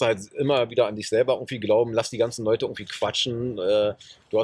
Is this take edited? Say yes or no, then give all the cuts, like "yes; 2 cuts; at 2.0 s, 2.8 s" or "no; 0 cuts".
no; 0 cuts